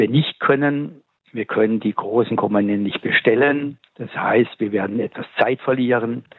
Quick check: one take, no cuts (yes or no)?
no